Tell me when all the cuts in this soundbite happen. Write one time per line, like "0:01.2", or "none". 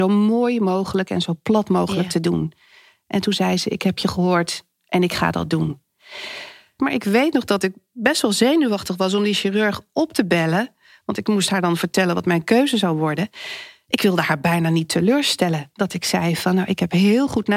0:06.8